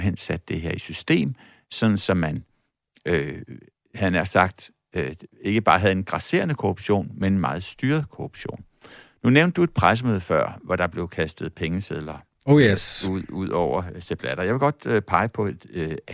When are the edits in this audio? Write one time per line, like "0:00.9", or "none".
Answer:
none